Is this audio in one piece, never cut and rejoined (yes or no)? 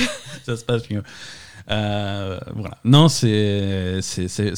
yes